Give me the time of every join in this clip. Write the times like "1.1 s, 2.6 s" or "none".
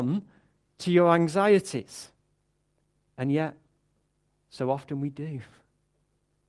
none